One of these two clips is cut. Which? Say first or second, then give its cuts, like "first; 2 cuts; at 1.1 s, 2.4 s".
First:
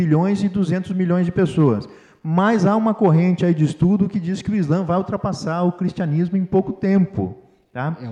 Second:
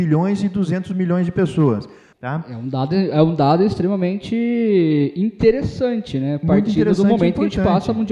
second; 1 cut; at 2.1 s